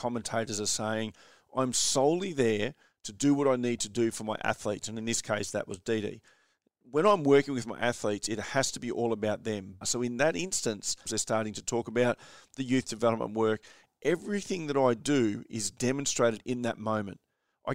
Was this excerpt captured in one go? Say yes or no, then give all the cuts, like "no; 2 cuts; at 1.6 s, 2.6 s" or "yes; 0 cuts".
no; 2 cuts; at 9.8 s, 11.1 s